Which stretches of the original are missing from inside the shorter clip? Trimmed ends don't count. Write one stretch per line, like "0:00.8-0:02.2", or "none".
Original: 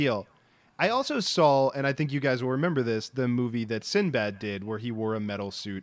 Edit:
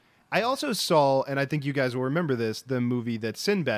none